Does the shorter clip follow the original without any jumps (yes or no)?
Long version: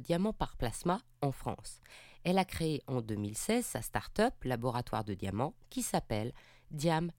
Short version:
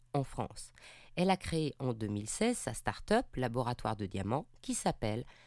yes